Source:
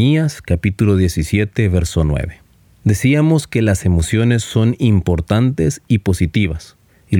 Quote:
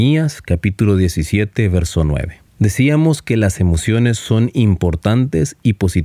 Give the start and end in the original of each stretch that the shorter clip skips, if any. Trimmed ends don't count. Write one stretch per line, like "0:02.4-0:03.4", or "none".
0:02.5-0:02.7